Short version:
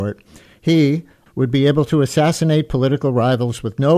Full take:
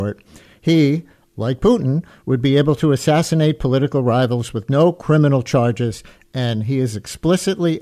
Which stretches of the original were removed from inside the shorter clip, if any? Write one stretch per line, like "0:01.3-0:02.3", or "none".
0:01.3-0:02.2